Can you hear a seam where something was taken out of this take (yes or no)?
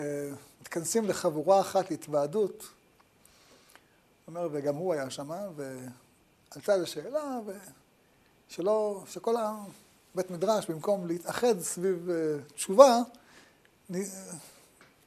no